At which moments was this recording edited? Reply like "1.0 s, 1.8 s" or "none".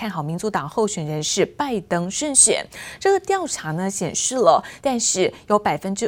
4.8 s